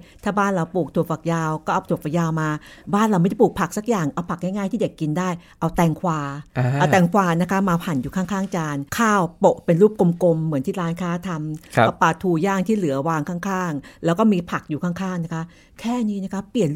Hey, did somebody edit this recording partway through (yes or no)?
yes